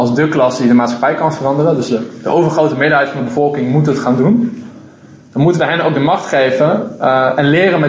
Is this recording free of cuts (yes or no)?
yes